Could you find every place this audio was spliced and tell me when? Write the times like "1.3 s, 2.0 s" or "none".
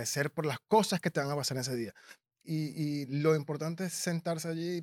2.4 s